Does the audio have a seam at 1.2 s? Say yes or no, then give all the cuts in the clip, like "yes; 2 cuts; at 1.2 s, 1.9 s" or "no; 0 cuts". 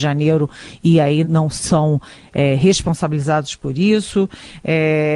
yes; 1 cut; at 1.2 s